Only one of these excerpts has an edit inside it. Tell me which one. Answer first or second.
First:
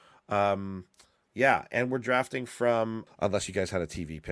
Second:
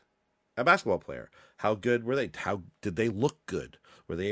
first